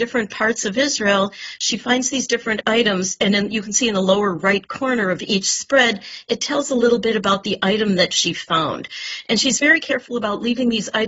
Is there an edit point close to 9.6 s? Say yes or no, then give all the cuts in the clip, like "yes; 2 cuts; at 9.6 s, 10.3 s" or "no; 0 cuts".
no; 0 cuts